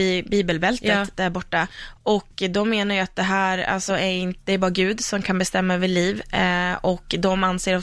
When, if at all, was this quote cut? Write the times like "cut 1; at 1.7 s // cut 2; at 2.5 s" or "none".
none